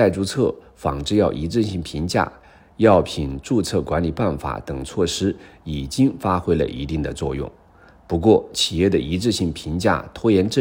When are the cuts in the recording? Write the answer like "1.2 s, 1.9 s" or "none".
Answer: 2.6 s